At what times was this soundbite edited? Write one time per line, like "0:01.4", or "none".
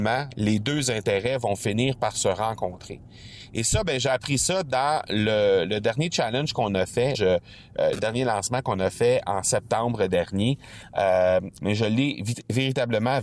0:07.1
0:11.6